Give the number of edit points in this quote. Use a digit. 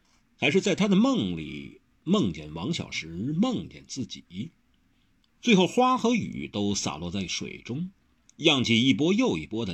1